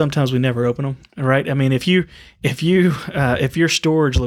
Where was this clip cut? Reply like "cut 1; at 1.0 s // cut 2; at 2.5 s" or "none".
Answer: cut 1; at 1.1 s